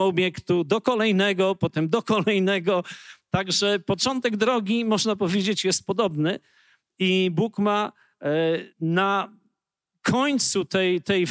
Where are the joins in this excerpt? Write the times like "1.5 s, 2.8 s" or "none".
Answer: 8.7 s